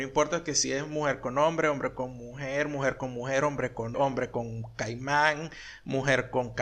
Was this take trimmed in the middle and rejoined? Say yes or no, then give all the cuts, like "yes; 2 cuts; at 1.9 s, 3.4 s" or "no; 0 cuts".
yes; 1 cut; at 3.9 s